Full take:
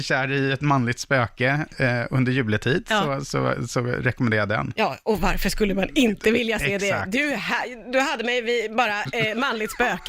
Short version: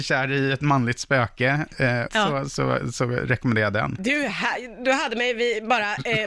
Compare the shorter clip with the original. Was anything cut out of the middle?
yes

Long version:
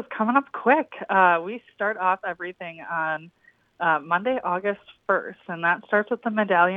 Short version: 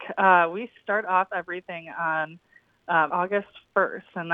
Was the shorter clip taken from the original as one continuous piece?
no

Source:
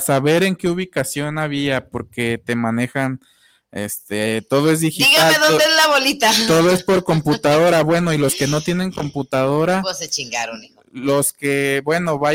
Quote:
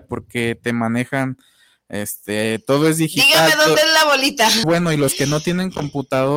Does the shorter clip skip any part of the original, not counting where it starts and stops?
yes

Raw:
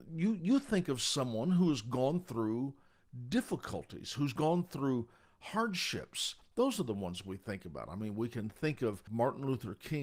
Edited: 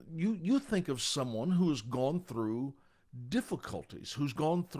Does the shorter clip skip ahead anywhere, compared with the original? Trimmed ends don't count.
no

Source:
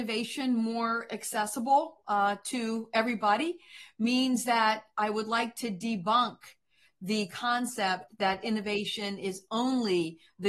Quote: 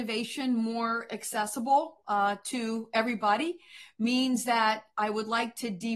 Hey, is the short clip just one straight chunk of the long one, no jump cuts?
yes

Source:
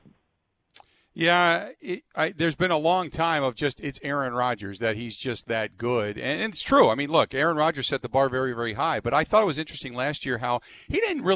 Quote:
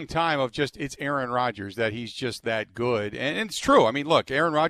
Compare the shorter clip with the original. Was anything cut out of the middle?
no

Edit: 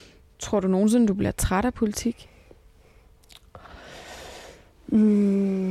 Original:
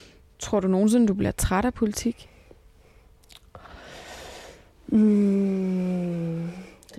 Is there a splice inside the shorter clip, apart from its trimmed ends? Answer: no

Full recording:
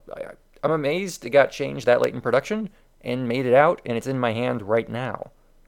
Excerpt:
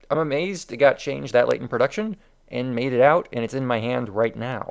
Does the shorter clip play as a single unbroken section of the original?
yes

